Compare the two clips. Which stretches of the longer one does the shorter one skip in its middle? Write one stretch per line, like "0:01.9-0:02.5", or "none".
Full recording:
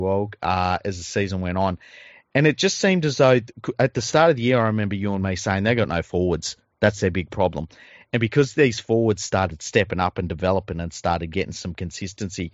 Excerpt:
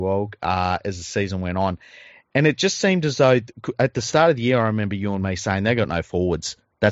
none

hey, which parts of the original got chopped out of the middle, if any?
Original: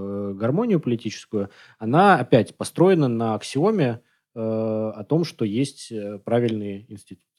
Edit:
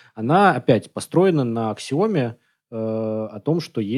none

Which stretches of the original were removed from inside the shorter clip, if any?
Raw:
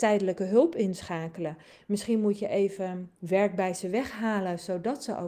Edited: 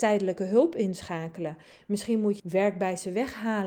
0:02.4-0:03.2

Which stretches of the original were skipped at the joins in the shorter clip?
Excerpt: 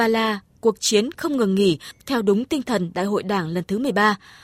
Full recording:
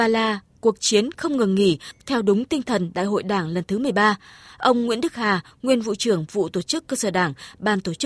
none

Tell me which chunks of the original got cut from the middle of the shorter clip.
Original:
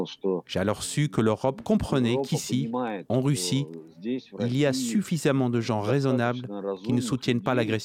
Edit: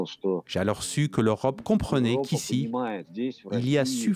0:03.0-0:03.9

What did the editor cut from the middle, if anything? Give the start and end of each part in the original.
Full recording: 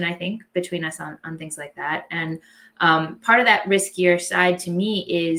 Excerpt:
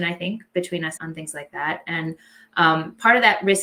0:01.0-0:01.2

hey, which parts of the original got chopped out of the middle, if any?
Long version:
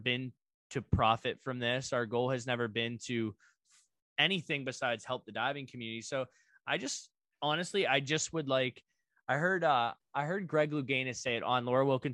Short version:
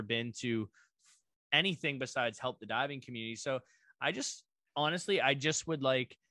none

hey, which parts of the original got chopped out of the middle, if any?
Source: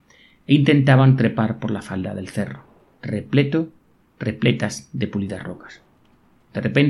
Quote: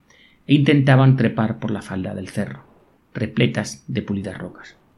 0:03.0-0:04.0

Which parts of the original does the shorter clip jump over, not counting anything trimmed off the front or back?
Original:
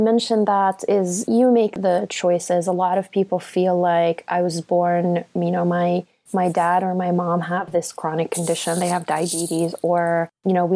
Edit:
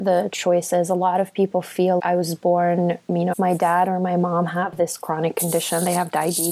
0:03.8-0:04.2
0:05.6-0:06.3

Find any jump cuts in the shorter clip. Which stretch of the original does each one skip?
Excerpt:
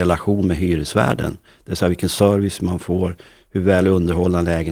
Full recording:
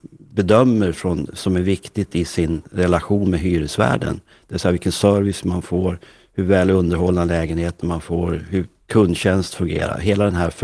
none

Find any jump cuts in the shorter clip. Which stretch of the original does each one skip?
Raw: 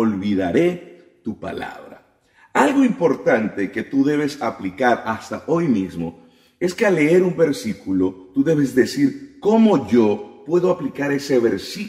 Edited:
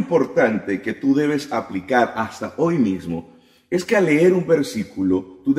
none

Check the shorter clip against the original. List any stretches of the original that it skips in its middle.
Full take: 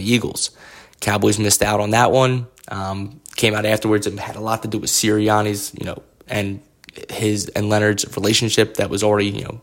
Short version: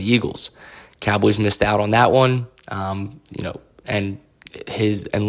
0:03.3-0:05.7

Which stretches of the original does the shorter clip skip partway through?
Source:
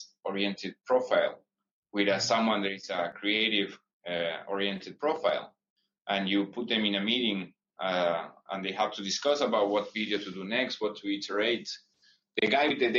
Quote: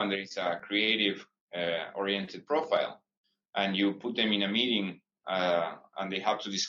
none

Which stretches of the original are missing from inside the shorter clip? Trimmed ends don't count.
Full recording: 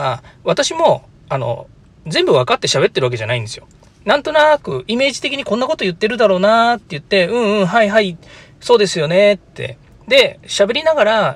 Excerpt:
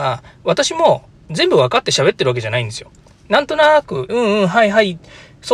0:01.2-0:02.0
0:04.8-0:07.3

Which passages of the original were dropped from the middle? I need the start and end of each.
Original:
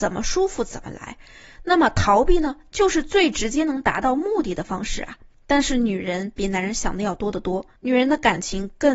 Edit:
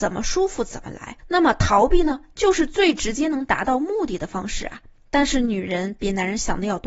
0:01.2-0:01.6

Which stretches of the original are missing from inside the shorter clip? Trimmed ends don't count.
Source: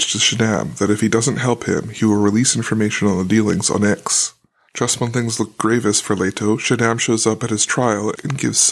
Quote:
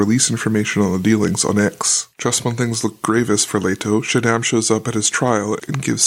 0:04.4-0:04.7

